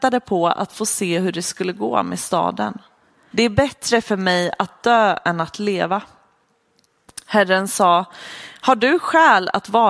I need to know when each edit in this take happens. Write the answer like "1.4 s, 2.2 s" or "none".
3.3 s